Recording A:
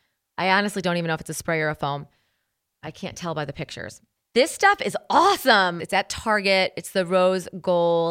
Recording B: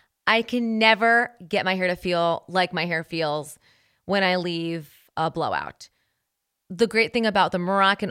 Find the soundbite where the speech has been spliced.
A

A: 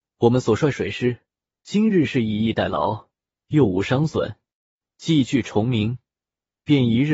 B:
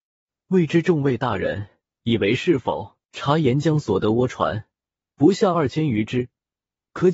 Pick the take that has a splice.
B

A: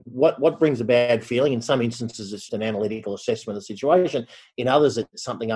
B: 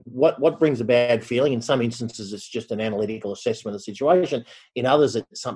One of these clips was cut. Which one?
A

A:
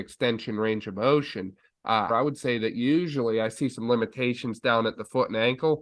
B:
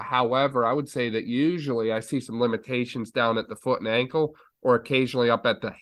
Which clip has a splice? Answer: A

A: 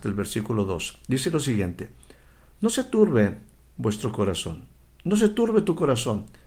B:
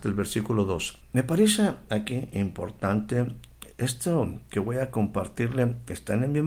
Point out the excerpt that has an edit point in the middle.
B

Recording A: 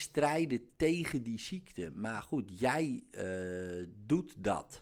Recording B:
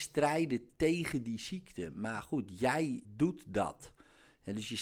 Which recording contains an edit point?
B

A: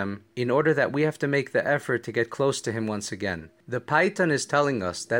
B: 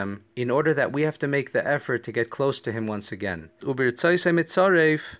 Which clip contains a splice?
B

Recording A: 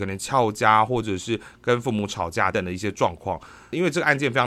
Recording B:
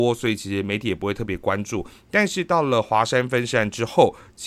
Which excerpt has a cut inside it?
A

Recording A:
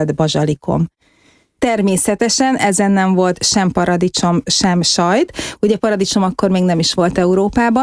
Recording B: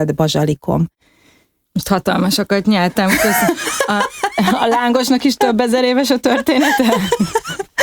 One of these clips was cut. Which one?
A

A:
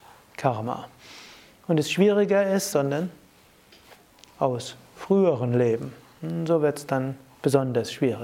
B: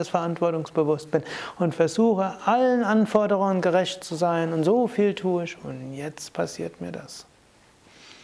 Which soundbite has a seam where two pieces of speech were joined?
A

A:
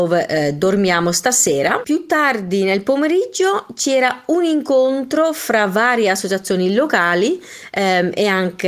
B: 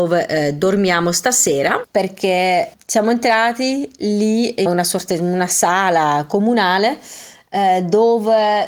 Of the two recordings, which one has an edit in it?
B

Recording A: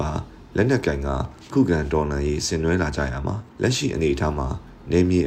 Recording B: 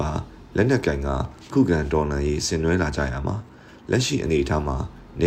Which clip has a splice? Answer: A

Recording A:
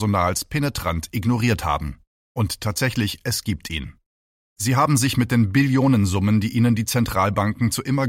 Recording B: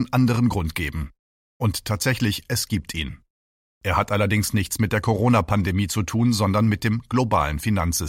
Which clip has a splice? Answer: A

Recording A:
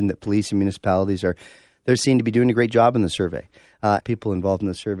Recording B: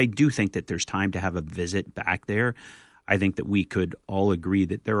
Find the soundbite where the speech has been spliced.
A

